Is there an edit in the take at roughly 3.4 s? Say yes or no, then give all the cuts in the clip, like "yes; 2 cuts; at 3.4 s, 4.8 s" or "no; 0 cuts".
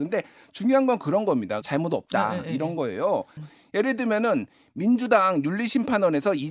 yes; 2 cuts; at 1.6 s, 3.4 s